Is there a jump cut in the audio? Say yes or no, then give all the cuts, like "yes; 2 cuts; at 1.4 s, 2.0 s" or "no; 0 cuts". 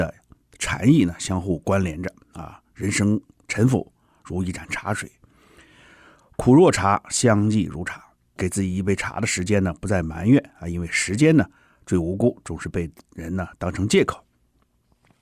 yes; 1 cut; at 8.4 s